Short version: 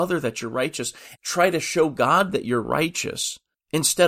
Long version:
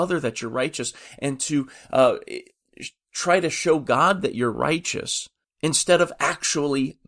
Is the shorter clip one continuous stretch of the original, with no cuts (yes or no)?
no